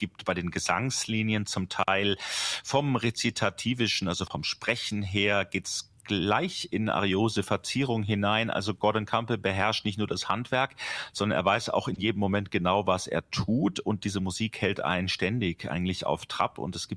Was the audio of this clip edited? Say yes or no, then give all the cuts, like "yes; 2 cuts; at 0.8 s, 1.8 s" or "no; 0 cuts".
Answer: yes; 1 cut; at 4.3 s